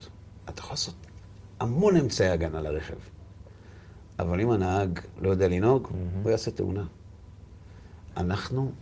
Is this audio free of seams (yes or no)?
yes